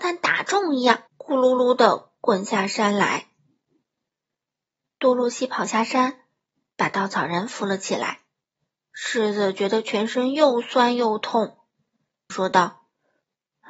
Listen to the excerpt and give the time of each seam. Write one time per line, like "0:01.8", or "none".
0:01.1
0:12.3